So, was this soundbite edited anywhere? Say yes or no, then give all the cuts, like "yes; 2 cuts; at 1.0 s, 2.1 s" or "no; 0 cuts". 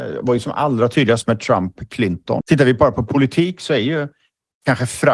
yes; 1 cut; at 2.4 s